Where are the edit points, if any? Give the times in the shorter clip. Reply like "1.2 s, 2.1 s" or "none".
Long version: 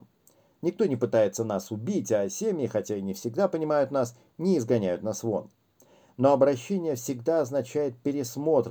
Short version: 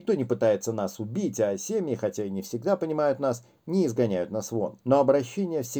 4.8 s